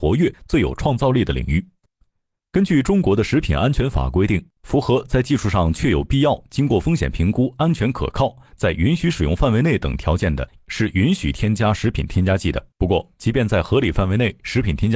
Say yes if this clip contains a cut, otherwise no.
yes